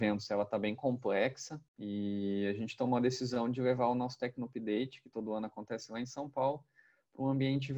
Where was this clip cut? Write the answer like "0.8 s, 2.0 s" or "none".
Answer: 1.7 s